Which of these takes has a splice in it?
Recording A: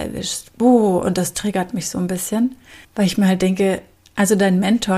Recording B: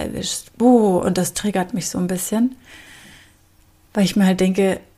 A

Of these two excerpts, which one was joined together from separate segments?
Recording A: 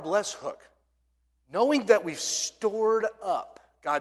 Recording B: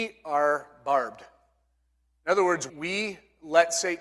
B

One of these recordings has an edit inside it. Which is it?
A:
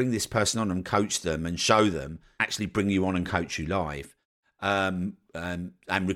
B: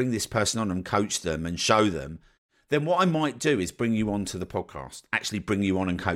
A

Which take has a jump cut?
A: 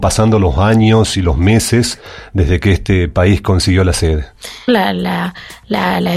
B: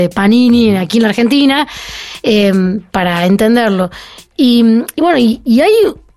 A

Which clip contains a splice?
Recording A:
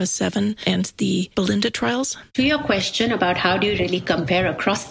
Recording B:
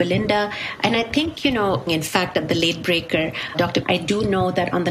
B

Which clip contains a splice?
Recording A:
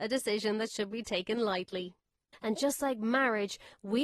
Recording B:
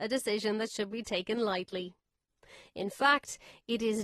A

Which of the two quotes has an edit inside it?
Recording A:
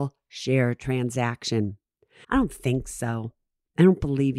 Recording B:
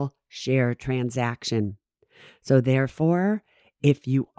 A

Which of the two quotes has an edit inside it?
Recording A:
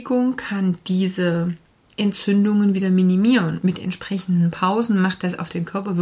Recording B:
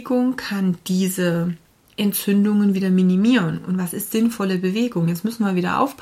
A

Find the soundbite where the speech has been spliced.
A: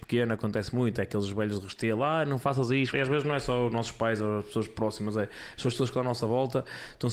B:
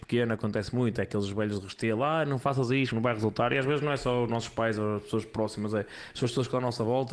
A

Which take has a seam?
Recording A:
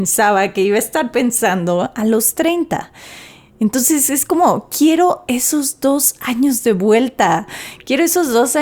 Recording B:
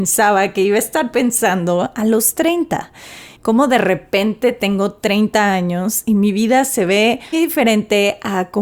B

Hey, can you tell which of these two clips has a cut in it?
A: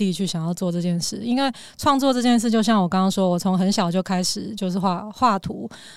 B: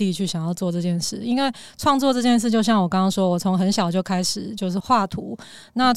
B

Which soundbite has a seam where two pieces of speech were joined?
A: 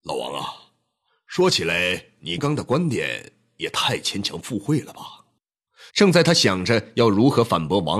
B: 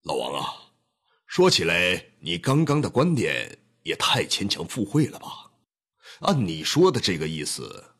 A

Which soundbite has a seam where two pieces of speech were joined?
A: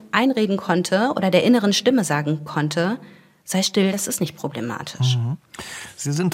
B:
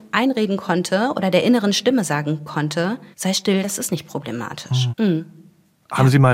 B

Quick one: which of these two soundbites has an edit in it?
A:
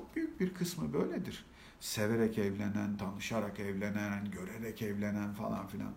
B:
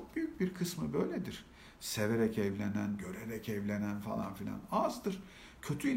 B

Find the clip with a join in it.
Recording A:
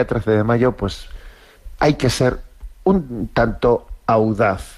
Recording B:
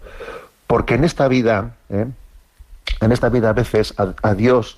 A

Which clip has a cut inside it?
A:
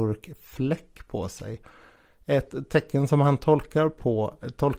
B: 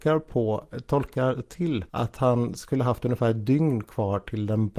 B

